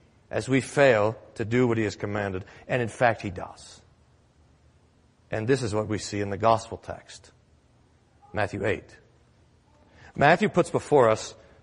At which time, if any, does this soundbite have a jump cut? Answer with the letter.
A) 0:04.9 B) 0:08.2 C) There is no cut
C